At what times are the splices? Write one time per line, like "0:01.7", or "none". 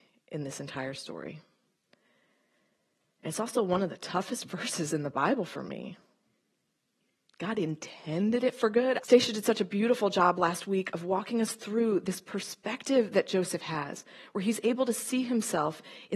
0:09.0